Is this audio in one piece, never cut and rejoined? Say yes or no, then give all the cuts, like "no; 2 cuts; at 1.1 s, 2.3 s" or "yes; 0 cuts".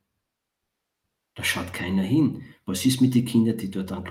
yes; 0 cuts